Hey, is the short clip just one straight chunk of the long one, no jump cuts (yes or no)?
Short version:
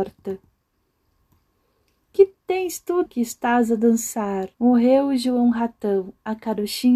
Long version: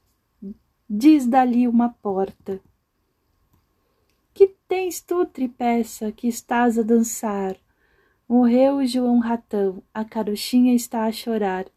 no